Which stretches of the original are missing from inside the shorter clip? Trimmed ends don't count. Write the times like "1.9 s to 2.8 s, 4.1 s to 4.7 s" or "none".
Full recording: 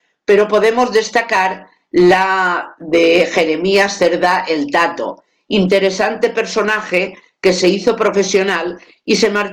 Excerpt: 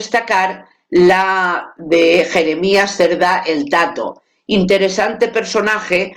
none